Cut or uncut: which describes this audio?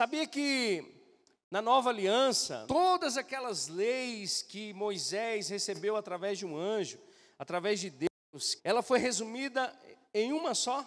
cut